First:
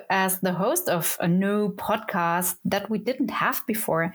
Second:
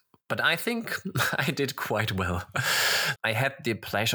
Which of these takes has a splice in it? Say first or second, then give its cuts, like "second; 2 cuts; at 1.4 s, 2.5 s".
second; 1 cut; at 3.2 s